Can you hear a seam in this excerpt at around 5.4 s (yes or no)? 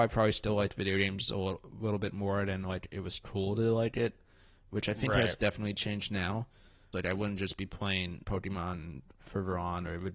no